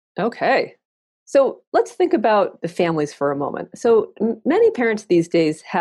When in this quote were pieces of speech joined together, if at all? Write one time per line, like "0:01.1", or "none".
none